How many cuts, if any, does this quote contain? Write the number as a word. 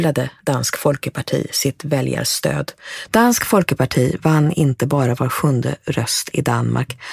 one